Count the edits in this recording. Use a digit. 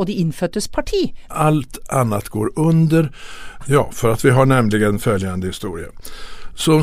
2